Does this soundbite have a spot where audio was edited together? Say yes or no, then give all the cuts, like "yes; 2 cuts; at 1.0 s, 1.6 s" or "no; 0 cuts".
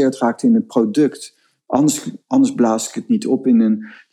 yes; 1 cut; at 1.6 s